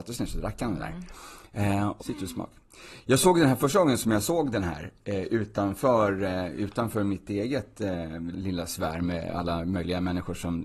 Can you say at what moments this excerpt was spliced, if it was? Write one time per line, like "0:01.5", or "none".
0:02.0
0:08.3